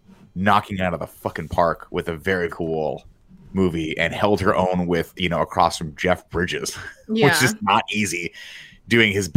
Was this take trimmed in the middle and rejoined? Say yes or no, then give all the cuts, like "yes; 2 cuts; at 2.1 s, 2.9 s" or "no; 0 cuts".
yes; 1 cut; at 2.5 s